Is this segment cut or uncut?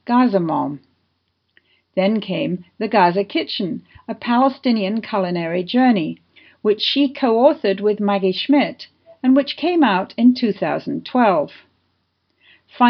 uncut